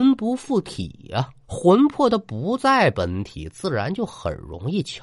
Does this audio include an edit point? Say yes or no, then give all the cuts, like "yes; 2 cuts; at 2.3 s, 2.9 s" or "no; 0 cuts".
yes; 1 cut; at 1.4 s